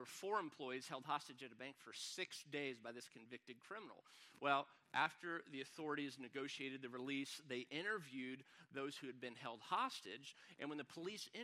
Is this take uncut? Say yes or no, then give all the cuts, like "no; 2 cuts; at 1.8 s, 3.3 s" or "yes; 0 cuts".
yes; 0 cuts